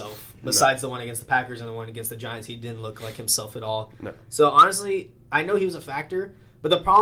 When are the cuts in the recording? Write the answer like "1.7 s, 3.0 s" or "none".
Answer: 5.2 s